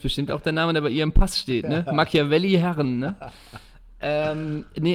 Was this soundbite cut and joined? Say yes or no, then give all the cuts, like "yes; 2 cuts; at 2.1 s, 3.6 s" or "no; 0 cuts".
no; 0 cuts